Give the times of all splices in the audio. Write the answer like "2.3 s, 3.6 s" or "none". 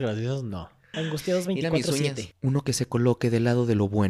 0.9 s, 2.3 s